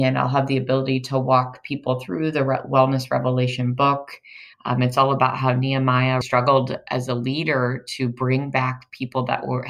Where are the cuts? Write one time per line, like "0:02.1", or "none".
0:04.5
0:06.2